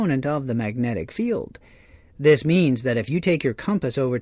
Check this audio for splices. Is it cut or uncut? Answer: uncut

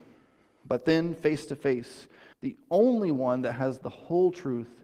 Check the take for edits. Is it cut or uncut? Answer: cut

